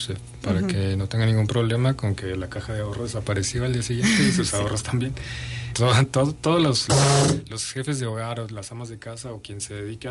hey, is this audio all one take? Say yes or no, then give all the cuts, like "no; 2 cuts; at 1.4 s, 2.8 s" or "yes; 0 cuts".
no; 1 cut; at 5.7 s